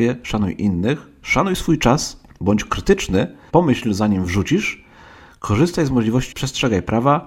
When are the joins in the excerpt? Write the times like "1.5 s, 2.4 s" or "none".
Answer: 3.5 s, 6.3 s